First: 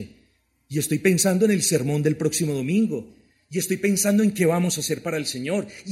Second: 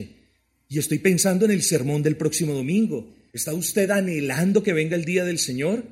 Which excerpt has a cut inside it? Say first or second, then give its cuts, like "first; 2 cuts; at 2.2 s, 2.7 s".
second; 1 cut; at 3.3 s